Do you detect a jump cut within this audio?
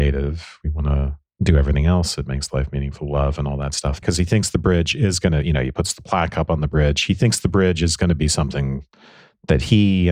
yes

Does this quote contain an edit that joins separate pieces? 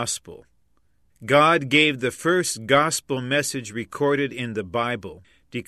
yes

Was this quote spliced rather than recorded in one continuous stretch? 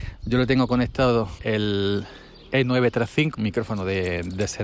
yes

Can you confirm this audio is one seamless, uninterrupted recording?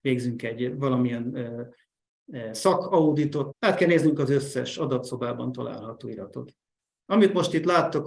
no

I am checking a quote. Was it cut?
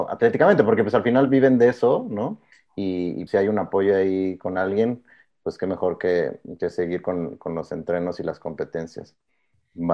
yes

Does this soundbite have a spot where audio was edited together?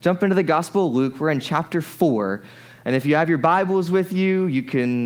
no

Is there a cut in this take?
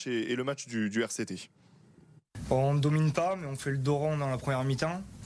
no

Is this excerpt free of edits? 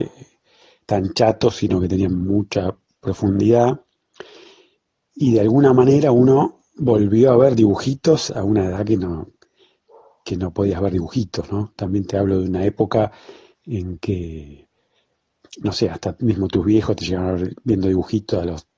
yes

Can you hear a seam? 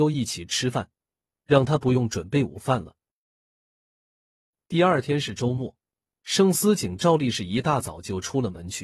yes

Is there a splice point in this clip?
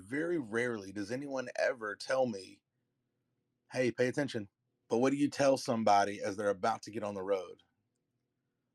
yes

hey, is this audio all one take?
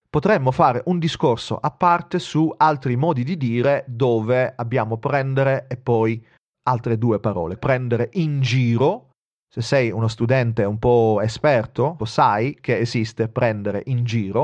no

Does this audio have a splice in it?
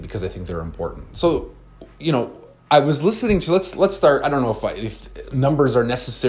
no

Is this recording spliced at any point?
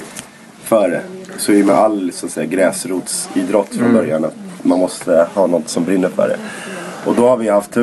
no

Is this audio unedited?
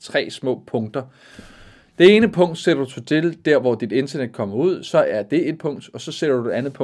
yes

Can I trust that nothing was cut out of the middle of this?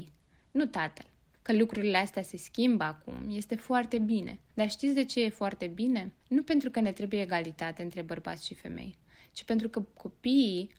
yes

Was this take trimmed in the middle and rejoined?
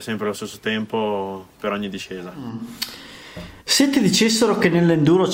yes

